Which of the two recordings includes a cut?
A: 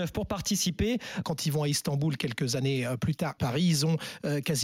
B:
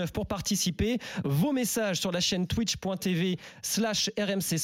A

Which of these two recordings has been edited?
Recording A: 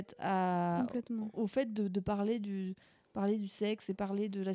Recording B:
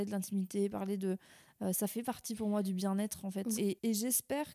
B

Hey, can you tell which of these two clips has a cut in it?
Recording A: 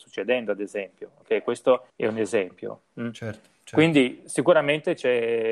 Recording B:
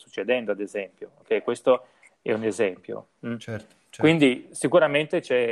A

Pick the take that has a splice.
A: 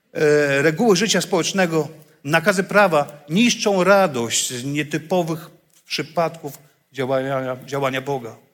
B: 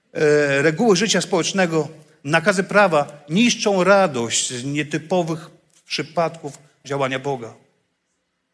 B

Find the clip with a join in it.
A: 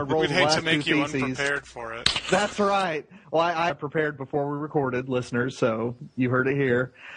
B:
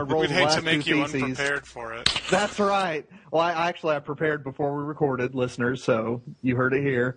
A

